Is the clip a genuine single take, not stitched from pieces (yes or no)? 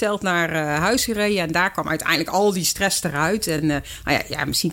yes